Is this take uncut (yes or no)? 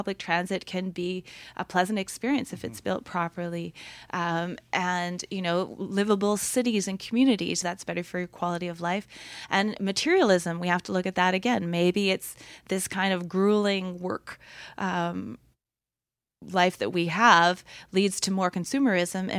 no